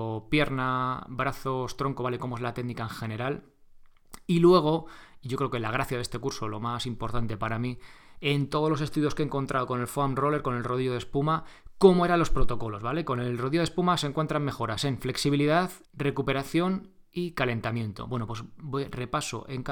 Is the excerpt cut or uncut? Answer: cut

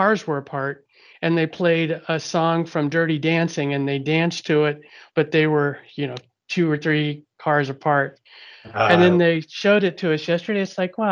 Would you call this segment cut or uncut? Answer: uncut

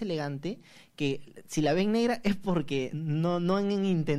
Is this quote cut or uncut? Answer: cut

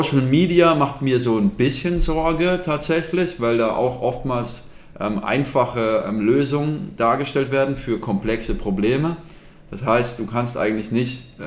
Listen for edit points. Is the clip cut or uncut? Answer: uncut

